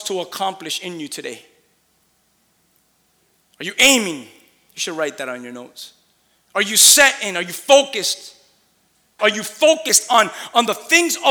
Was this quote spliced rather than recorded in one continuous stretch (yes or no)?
yes